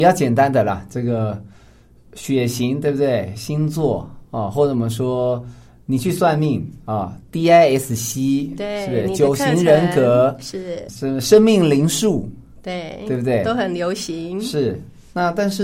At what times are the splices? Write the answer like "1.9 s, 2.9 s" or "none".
10.9 s